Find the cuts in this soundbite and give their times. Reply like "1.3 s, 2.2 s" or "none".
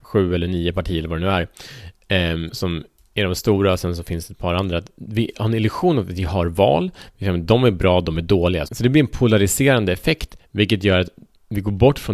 2.5 s, 8.7 s

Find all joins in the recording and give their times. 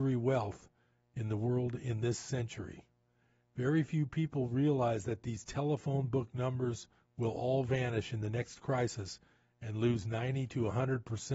none

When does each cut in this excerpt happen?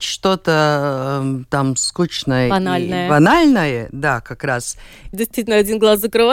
5.1 s

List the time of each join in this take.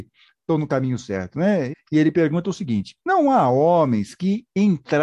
1.7 s, 3.0 s

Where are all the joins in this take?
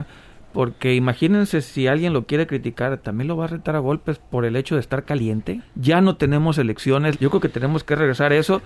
5.6 s, 7.1 s

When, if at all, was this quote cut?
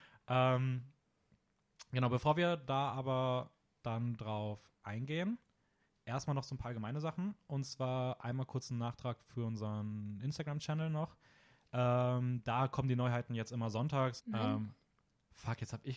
14.2 s

